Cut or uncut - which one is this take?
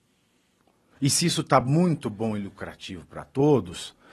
uncut